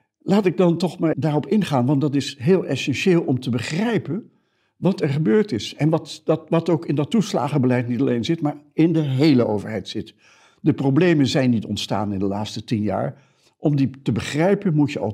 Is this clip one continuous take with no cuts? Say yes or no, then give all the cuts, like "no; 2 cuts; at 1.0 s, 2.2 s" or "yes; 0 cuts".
no; 1 cut; at 1.1 s